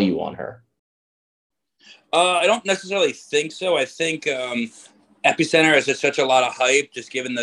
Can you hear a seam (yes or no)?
no